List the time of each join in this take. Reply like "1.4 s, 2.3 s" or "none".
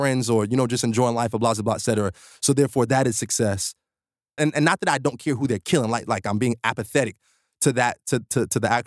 4.4 s